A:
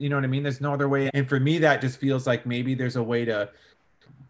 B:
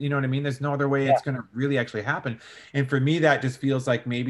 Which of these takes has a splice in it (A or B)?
A